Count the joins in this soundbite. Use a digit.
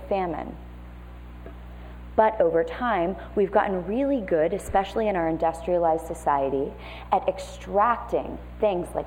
0